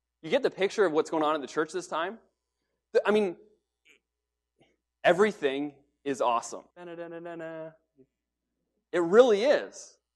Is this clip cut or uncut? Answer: cut